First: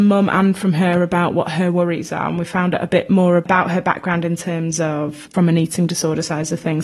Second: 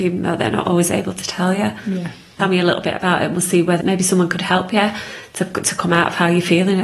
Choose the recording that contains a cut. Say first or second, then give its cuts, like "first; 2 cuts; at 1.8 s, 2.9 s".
second; 2 cuts; at 2.4 s, 3.8 s